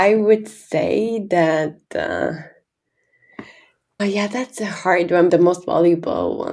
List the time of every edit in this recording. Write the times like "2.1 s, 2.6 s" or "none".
4.0 s, 5.3 s